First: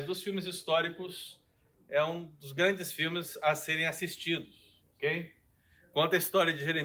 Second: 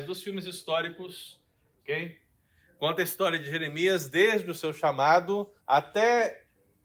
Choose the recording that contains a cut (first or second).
second